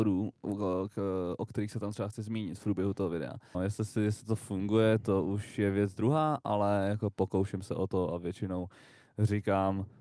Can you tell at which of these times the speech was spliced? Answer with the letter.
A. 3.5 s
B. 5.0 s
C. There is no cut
A